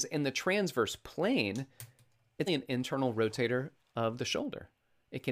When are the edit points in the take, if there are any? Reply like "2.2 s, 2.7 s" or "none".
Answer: 2.5 s